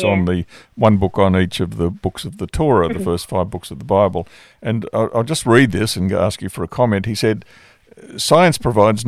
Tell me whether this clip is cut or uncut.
uncut